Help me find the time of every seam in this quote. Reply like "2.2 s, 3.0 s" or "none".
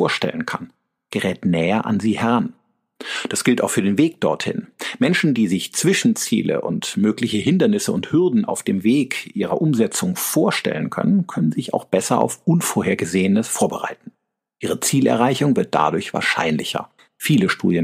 none